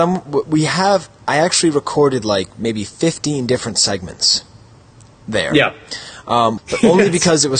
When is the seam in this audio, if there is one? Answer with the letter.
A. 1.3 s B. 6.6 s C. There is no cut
B